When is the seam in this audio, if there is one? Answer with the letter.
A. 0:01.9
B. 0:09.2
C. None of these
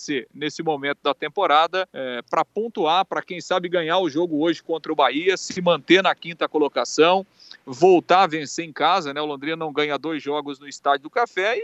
A